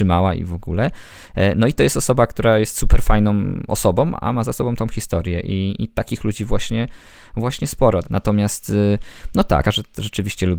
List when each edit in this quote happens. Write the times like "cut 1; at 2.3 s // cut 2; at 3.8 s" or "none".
cut 1; at 8.0 s // cut 2; at 9.6 s